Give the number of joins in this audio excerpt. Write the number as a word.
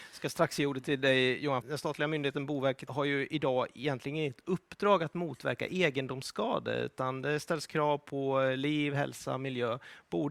two